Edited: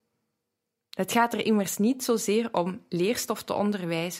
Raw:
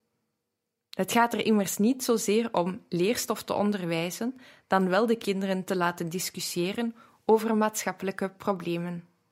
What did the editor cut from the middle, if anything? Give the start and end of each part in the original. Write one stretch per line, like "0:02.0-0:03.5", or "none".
none